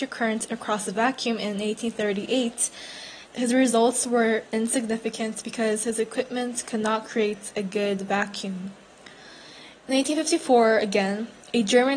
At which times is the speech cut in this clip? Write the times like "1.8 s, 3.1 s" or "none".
3.3 s